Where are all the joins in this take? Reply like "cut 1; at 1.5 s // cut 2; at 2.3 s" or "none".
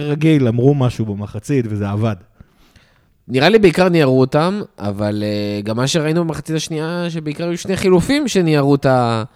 none